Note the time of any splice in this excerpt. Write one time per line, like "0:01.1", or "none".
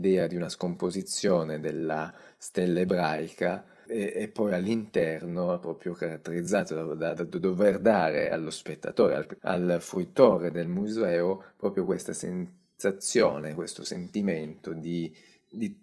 0:07.2